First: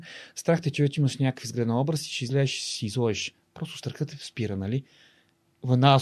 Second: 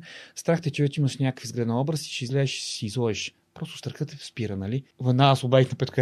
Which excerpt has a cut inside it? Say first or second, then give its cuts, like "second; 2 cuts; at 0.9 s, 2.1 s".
second; 1 cut; at 4.9 s